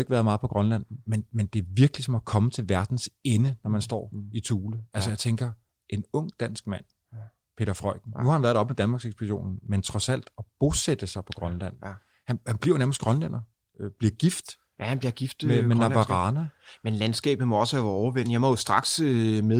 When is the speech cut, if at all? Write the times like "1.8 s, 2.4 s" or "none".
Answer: none